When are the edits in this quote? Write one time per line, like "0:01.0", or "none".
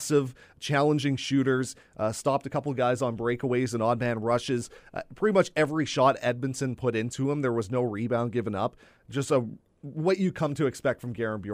none